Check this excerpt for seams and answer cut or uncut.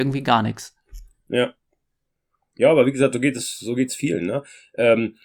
uncut